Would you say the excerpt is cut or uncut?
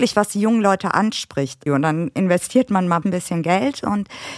cut